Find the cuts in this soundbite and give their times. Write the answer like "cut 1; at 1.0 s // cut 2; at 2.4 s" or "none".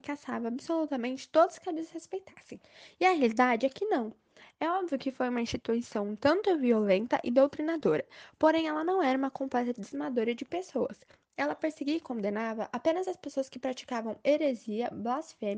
none